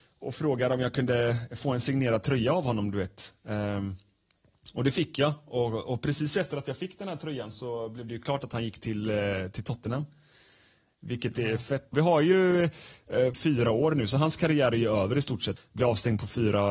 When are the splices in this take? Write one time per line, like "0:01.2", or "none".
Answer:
0:11.9
0:13.3
0:15.6

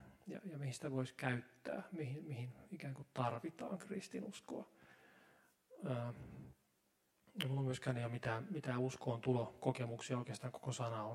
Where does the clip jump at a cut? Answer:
none

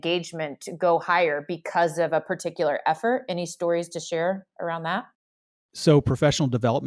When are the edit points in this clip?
none

